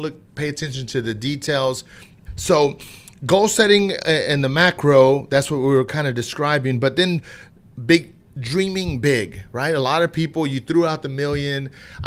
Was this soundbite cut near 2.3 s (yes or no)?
yes